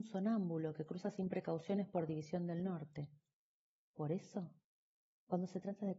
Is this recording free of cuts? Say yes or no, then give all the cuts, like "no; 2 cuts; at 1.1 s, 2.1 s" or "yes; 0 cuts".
no; 1 cut; at 3.8 s